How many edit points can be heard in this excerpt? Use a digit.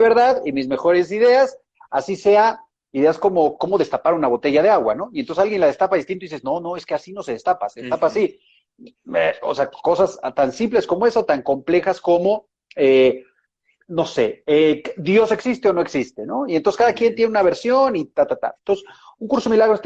0